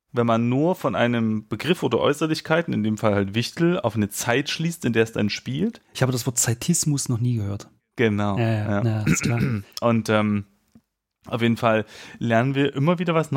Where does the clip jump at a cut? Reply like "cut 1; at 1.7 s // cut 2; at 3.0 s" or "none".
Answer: cut 1; at 7.8 s